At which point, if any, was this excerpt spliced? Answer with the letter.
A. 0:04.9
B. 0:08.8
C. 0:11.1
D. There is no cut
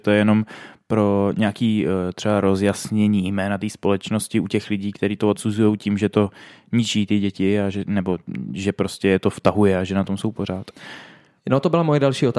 D